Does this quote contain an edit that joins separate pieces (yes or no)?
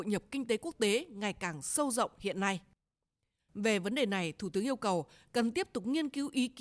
yes